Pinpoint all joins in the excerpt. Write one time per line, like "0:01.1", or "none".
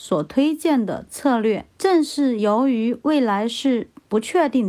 0:01.7